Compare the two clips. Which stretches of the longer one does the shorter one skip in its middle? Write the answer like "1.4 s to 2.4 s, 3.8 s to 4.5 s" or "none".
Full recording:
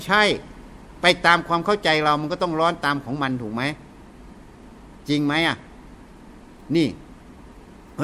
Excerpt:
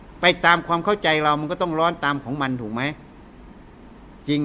none